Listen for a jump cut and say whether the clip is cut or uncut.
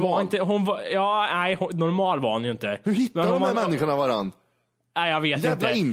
uncut